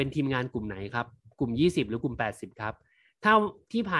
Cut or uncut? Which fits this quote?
uncut